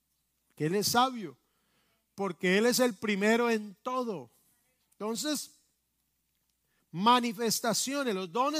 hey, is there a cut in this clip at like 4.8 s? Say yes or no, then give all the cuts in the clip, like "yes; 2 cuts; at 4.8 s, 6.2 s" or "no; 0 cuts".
yes; 1 cut; at 4.8 s